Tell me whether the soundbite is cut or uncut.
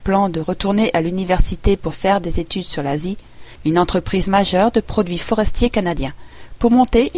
cut